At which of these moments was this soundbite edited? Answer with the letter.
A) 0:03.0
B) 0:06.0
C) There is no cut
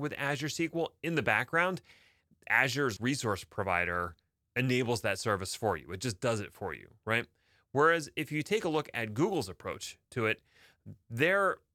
A